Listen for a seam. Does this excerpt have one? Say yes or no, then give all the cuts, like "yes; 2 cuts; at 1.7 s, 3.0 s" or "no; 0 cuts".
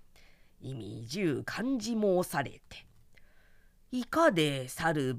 no; 0 cuts